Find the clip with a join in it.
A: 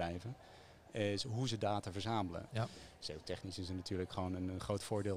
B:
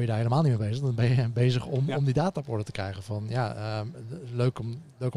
A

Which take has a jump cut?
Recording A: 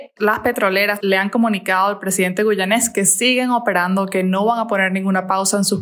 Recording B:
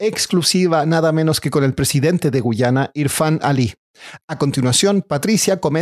A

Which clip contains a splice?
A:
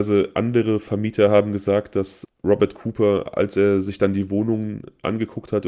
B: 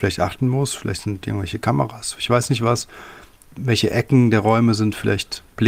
B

